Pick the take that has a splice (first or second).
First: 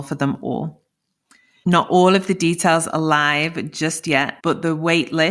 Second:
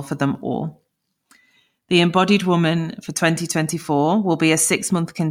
first